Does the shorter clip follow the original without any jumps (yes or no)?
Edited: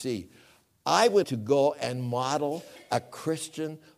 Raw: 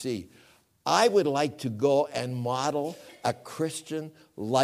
no